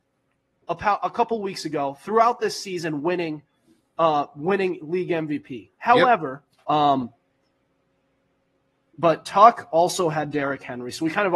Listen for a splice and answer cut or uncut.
cut